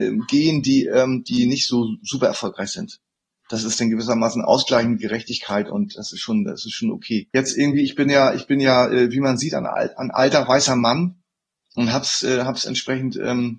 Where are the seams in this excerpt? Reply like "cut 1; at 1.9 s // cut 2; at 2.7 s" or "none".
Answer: cut 1; at 7.3 s